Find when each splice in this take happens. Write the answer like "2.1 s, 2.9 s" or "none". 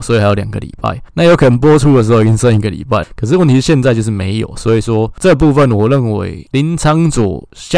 3.0 s

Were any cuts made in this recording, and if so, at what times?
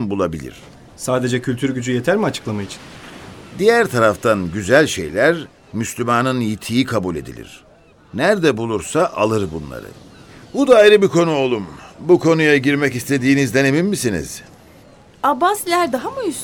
10.4 s

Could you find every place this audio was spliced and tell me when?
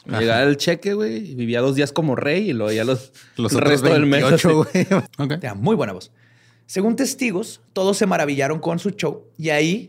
5.1 s

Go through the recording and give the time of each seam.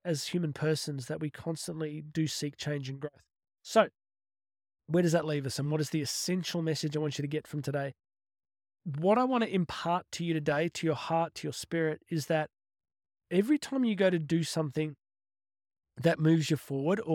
11.3 s

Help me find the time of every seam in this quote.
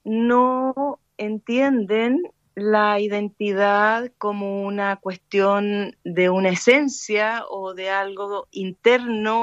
8.5 s

